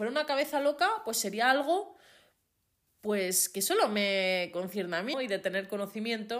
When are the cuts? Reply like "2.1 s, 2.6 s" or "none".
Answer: 5.1 s